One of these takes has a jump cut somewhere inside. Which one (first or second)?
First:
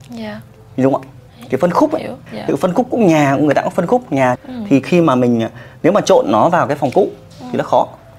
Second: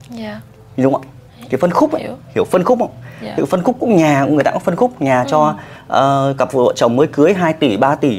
first